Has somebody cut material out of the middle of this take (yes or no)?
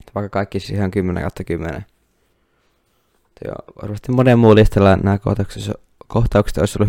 no